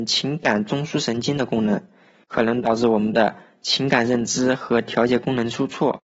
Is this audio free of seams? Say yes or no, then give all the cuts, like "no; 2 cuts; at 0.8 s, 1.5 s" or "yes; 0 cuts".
no; 1 cut; at 2.2 s